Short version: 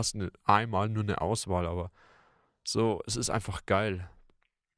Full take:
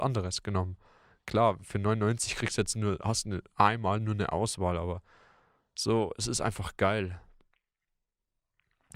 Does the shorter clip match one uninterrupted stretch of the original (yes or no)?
yes